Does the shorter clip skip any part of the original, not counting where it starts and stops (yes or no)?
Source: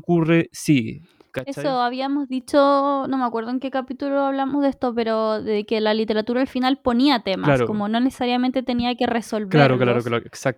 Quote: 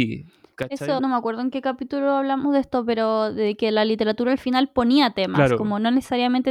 yes